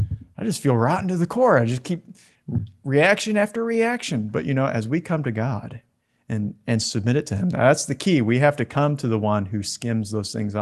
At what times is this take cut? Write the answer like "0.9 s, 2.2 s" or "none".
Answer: none